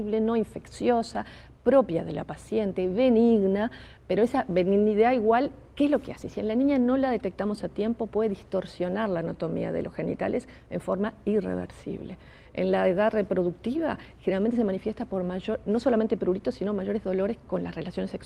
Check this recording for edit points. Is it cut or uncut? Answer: uncut